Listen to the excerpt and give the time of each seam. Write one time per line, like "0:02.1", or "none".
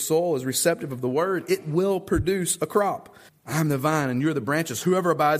0:03.3